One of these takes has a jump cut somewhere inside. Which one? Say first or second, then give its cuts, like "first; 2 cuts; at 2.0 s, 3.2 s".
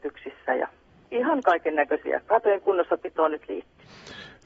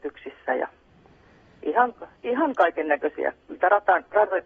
first; 2 cuts; at 1.0 s, 2.3 s